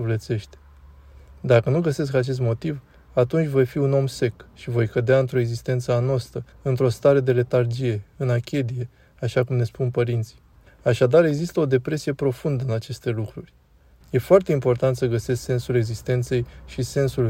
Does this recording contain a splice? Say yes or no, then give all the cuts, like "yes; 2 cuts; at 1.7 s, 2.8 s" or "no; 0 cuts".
yes; 3 cuts; at 6.5 s, 10.7 s, 14.0 s